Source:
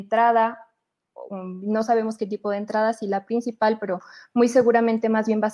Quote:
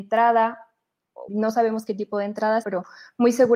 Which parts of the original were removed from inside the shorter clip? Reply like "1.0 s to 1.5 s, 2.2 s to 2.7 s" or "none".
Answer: 1.3 s to 1.6 s, 3.0 s to 3.8 s